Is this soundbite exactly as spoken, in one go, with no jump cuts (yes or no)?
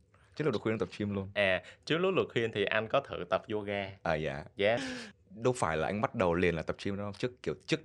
no